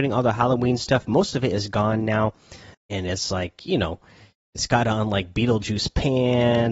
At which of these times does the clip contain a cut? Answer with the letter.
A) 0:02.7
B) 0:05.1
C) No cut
A